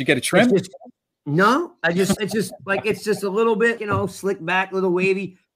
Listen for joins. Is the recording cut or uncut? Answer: cut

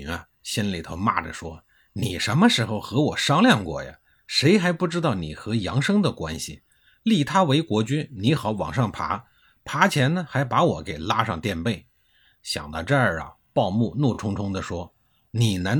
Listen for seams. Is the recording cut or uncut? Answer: uncut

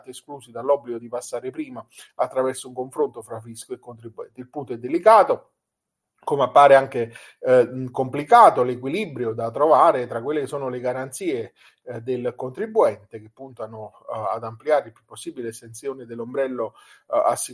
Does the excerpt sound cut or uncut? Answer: uncut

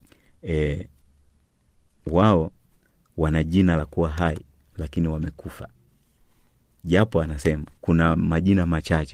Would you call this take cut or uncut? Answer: cut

